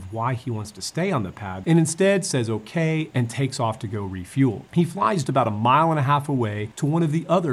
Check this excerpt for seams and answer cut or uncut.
cut